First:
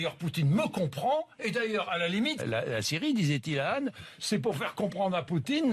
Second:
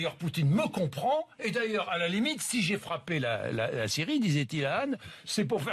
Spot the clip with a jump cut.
first; 1 cut; at 2.4 s

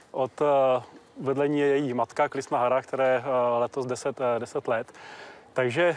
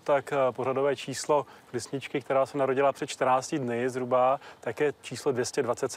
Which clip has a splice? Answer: first; 1 cut; at 2.3 s

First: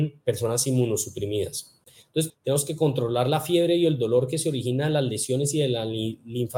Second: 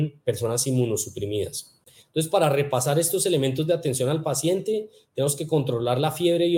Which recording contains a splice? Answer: first; 1 cut; at 2.3 s

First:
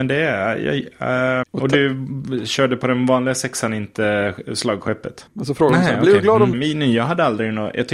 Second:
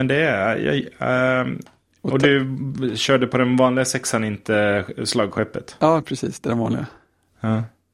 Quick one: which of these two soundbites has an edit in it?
first; 3 cuts; at 1.4 s, 5.3 s, 6.5 s

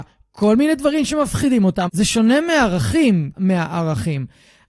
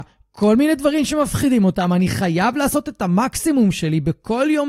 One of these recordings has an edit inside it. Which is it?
first; 2 cuts; at 1.9 s, 3.3 s

